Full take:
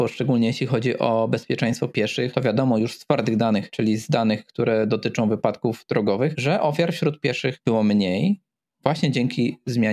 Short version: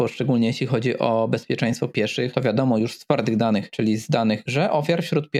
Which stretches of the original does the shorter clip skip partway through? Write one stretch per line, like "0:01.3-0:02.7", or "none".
0:04.5-0:06.4